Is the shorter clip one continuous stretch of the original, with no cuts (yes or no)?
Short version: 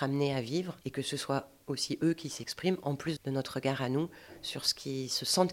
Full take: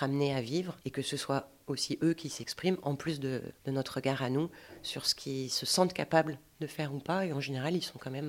no